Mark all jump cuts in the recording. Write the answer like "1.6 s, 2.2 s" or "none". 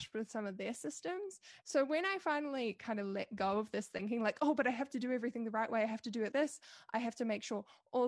1.6 s, 6.3 s